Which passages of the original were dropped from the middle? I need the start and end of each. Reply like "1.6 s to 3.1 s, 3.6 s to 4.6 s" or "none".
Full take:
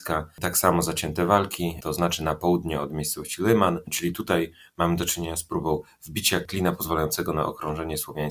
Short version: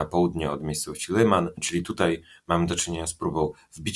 none